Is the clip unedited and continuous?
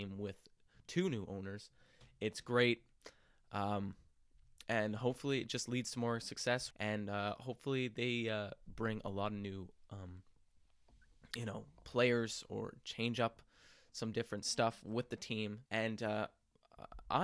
no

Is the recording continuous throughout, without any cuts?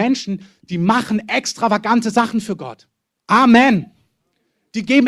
no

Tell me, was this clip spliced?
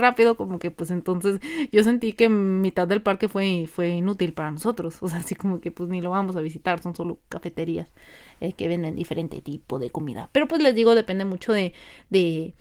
no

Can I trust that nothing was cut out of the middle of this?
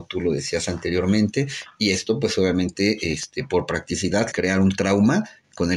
no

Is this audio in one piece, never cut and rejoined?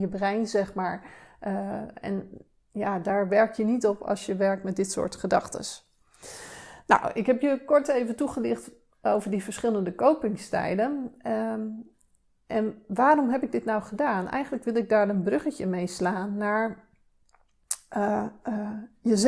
yes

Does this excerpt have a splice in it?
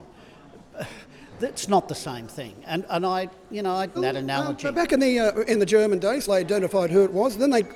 yes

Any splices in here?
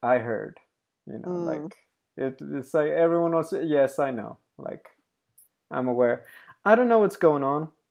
no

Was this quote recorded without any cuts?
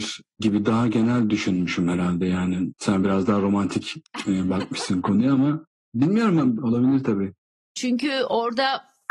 no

